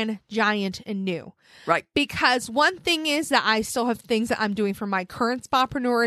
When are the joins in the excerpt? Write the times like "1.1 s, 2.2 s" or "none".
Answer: none